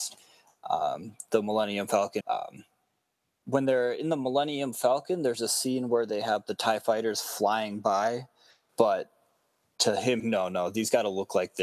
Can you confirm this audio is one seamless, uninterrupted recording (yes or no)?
no